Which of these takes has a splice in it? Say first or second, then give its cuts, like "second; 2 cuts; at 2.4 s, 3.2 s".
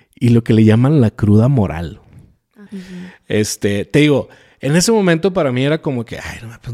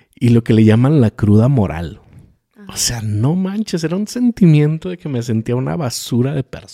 first; 1 cut; at 2.7 s